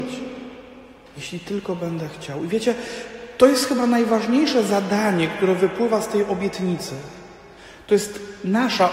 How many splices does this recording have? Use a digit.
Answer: 0